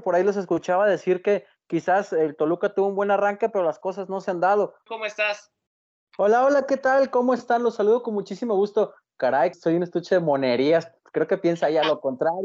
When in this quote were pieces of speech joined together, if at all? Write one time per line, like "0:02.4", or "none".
0:04.9
0:09.5